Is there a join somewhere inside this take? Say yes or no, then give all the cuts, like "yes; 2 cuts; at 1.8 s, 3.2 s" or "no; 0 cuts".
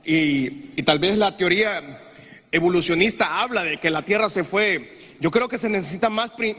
no; 0 cuts